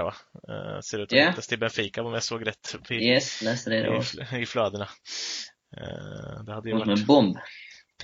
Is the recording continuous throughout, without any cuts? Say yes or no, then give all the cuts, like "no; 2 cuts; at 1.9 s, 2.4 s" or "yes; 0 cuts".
yes; 0 cuts